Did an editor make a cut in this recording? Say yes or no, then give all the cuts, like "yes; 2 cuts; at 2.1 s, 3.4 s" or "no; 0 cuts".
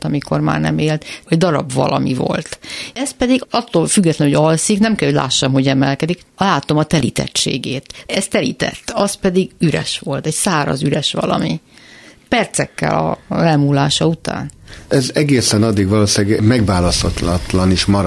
no; 0 cuts